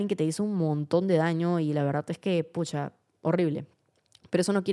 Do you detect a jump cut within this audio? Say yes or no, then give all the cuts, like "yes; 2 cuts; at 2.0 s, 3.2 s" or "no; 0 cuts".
no; 0 cuts